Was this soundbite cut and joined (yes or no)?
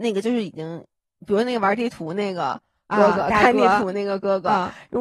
no